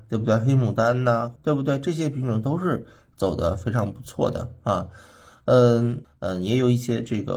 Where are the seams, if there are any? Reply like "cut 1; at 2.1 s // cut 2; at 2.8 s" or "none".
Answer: cut 1; at 1.4 s // cut 2; at 6.0 s